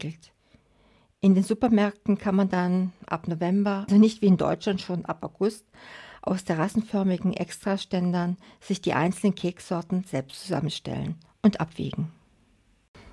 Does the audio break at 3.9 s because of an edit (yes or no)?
yes